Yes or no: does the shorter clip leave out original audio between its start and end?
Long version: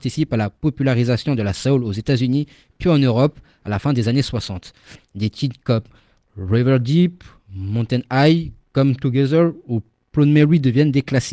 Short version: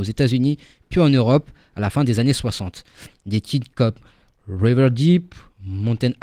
no